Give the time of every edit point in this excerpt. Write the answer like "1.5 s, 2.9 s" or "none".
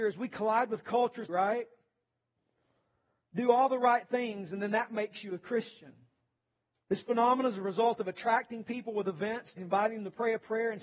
1.3 s, 6.7 s, 9.6 s